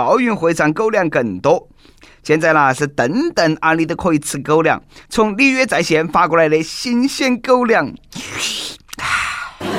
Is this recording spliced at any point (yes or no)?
yes